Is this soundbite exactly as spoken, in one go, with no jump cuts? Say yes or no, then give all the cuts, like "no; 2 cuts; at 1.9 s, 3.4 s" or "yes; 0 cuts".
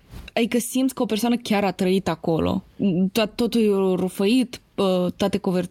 yes; 0 cuts